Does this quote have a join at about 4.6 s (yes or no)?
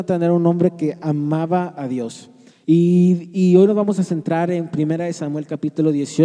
no